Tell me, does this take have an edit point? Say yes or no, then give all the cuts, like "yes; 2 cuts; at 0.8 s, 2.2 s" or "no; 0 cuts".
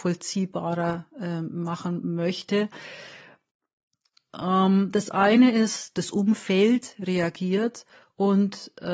yes; 1 cut; at 5.9 s